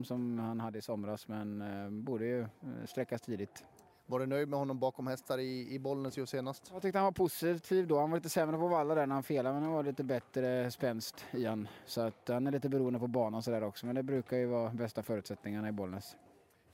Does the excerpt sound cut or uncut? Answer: uncut